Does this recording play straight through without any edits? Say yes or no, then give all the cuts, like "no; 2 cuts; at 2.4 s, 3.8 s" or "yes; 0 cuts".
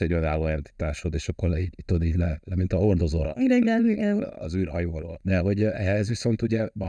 yes; 0 cuts